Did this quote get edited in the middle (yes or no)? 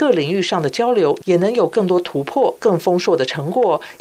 no